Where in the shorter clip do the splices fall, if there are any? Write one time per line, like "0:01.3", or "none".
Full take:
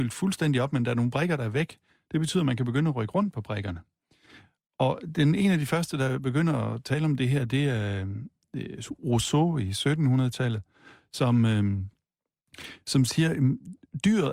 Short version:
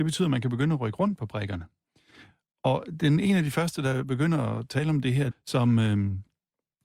0:05.3